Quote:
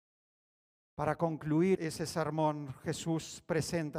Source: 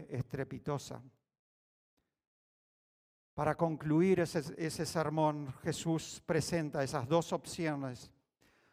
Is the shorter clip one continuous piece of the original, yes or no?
no